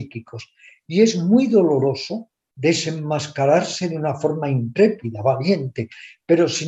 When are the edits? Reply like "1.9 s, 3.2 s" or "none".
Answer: none

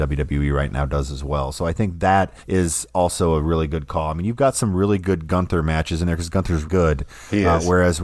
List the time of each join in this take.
2.4 s, 6.6 s

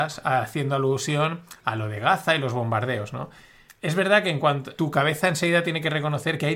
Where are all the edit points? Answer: 3.7 s, 4.8 s

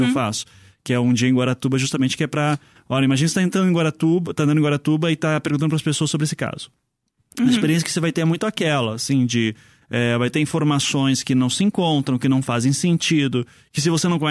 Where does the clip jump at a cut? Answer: none

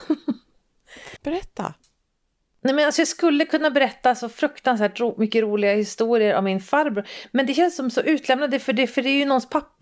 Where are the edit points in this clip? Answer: 1.2 s

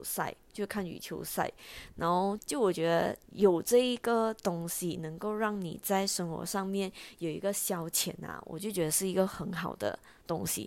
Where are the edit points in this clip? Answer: 2.4 s

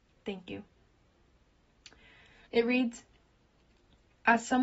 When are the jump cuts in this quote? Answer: 2.5 s

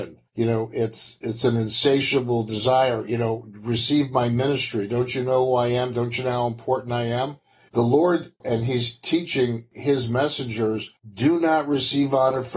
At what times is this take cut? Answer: none

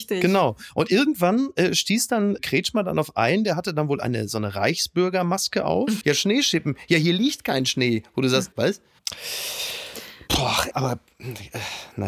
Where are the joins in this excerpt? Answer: 6.0 s, 8.5 s, 10.7 s

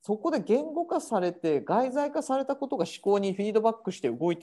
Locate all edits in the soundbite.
none

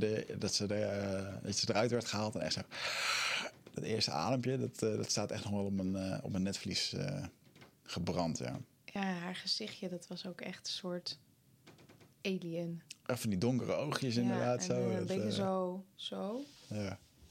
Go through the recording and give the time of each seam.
none

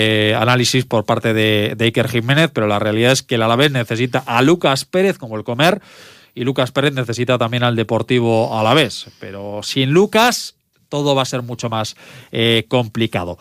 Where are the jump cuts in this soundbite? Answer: none

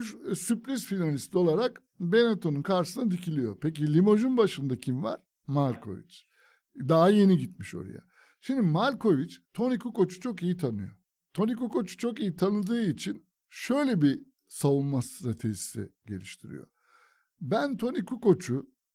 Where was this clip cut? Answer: none

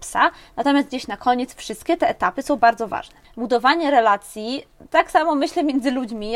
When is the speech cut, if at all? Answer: 3.2 s

